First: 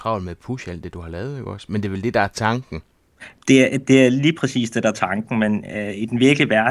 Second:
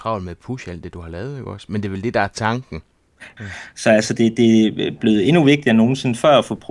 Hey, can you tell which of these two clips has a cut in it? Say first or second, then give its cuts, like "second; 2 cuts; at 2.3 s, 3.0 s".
second; 1 cut; at 3.4 s